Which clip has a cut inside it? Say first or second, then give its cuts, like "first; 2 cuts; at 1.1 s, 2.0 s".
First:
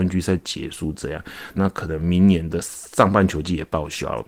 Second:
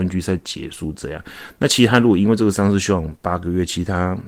first; 1 cut; at 1.5 s